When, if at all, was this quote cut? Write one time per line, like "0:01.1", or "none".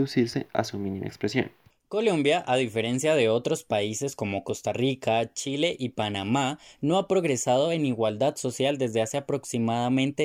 none